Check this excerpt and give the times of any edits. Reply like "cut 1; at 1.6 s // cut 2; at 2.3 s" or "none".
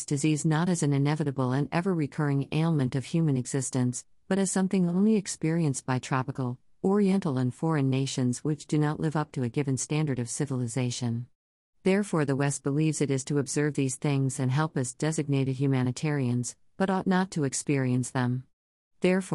none